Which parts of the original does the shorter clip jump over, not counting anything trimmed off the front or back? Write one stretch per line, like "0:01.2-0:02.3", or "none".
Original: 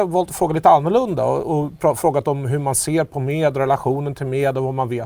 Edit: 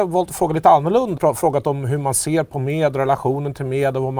0:01.2-0:01.8